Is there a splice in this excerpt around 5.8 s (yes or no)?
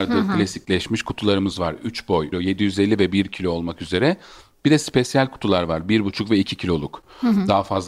no